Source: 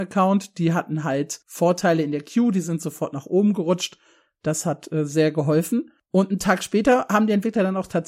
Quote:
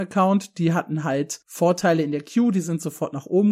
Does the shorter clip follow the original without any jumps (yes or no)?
yes